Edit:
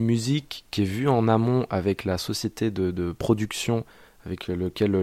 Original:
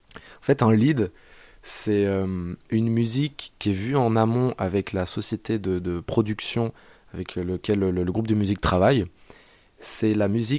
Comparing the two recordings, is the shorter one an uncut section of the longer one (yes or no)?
yes